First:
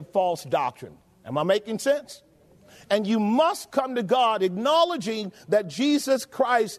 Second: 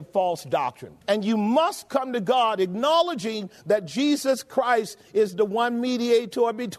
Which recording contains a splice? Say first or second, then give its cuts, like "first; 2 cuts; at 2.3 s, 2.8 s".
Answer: second; 1 cut; at 1.0 s